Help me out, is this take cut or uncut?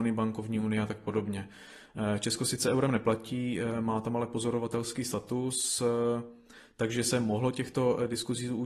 uncut